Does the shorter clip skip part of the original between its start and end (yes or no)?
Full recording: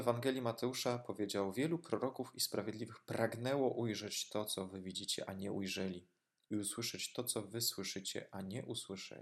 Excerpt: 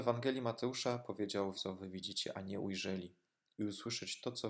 yes